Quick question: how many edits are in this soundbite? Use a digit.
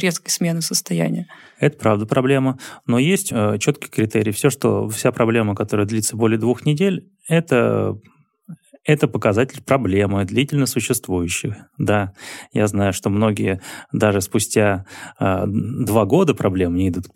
1